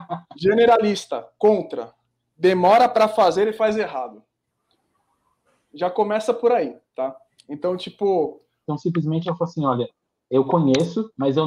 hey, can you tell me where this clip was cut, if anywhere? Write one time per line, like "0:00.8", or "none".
0:08.6